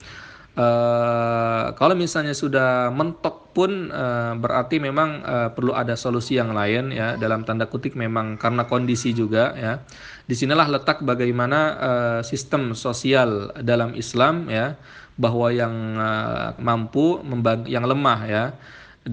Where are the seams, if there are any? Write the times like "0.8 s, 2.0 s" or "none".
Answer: 16.6 s, 17.7 s